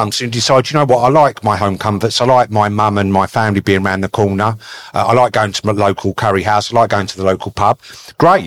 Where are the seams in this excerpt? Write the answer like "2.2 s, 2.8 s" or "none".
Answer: none

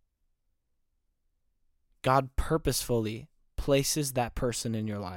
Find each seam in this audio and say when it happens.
1.9 s

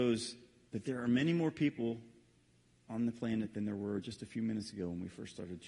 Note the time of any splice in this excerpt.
none

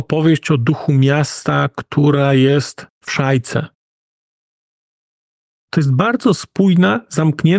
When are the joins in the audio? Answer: none

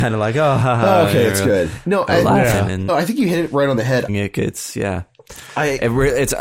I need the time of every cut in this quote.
2.9 s, 4.1 s

